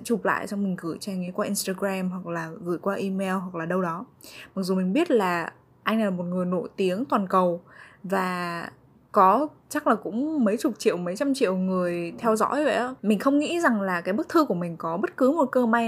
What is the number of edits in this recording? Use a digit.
2